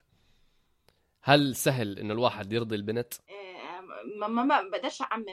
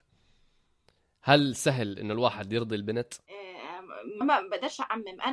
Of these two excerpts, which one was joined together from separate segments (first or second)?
second